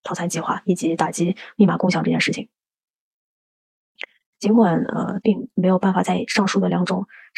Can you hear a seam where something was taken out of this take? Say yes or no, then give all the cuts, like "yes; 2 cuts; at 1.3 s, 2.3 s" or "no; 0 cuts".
yes; 1 cut; at 5.2 s